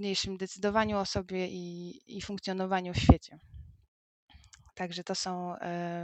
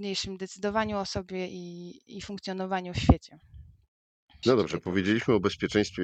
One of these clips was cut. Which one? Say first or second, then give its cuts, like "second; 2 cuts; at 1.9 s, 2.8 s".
second; 1 cut; at 4.4 s